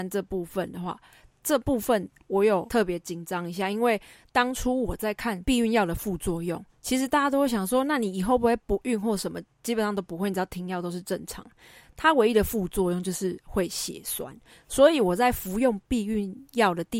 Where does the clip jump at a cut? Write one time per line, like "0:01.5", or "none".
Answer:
none